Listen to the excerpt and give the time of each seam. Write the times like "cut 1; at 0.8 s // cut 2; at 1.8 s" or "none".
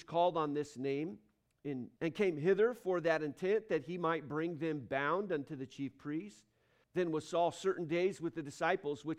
cut 1; at 2.0 s // cut 2; at 6.8 s